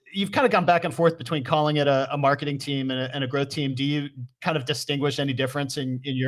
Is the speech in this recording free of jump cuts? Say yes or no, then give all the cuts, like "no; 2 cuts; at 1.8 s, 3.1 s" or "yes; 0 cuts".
yes; 0 cuts